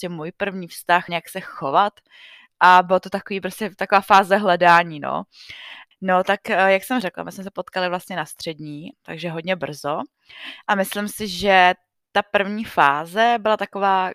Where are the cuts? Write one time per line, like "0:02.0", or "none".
0:01.1
0:05.9
0:08.9